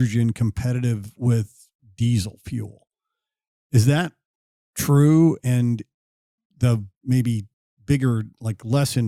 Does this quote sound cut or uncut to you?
uncut